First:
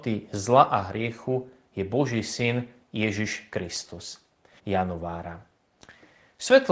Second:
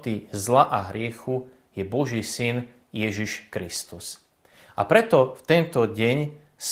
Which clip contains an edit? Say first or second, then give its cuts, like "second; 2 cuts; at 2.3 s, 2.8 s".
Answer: first; 1 cut; at 4.6 s